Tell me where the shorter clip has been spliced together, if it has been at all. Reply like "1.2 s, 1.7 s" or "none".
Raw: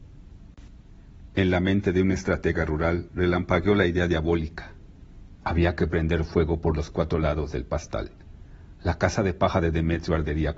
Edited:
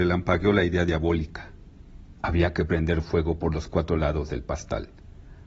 none